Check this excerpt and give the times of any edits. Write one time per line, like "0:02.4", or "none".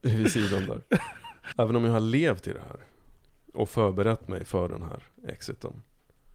0:01.5